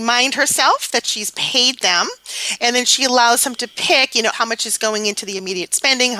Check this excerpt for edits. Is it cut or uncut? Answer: cut